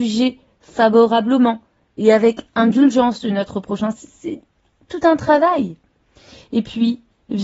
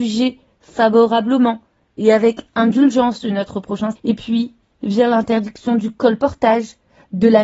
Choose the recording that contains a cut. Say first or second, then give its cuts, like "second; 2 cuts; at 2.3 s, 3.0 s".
second; 1 cut; at 4.0 s